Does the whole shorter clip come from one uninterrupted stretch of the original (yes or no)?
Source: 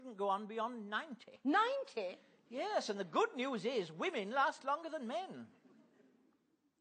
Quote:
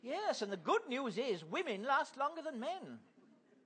yes